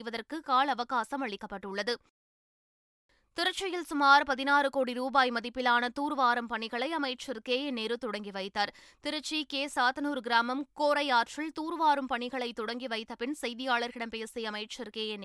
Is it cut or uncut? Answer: uncut